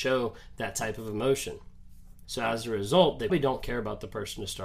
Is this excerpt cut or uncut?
cut